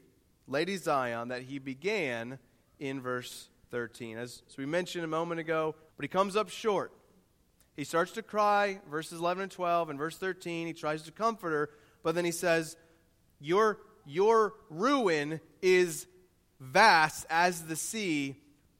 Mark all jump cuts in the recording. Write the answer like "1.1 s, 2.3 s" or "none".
5.9 s